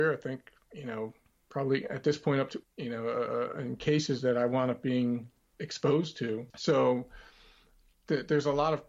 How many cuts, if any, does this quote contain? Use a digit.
2